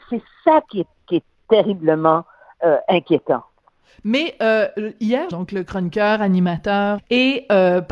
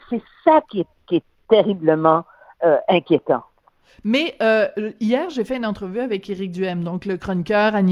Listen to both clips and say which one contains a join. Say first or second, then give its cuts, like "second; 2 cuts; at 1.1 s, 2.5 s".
first; 2 cuts; at 5.3 s, 7.0 s